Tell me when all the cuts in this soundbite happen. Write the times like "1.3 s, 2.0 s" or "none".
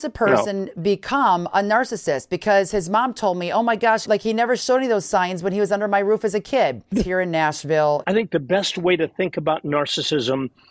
4.0 s, 6.9 s, 8.0 s